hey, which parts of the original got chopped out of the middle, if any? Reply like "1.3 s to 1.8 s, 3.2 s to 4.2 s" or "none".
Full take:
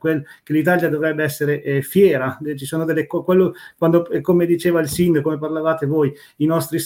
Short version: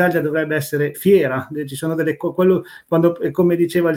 1.6 s to 1.8 s